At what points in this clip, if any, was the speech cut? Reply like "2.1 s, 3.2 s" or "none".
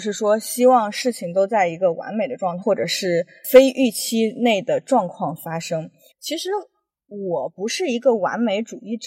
2.6 s, 6.1 s